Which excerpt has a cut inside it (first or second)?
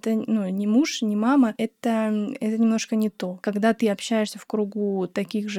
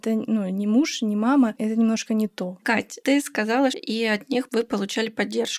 second